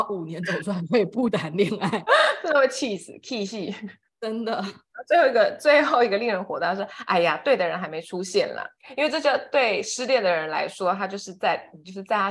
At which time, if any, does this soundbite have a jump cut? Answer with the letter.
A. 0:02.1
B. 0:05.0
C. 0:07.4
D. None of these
A